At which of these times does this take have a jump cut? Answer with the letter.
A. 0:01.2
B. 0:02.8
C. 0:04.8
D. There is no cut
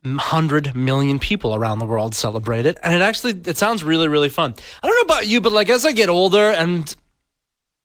D